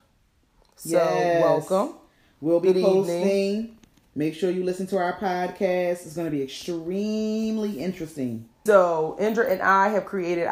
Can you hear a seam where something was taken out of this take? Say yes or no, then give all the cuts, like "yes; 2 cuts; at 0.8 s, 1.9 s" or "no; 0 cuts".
yes; 1 cut; at 8.7 s